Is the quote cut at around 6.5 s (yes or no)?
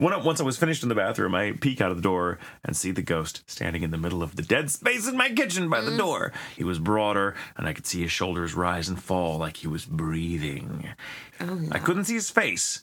yes